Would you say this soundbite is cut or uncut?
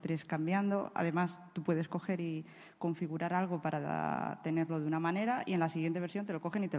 uncut